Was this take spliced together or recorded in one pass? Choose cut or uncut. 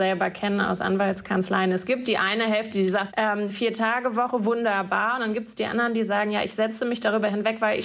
cut